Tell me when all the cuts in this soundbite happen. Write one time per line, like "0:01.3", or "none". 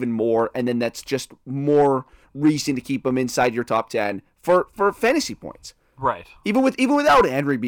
none